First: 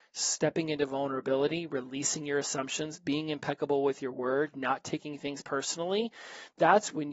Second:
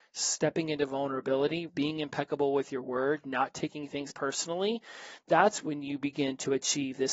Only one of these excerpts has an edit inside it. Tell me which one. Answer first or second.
second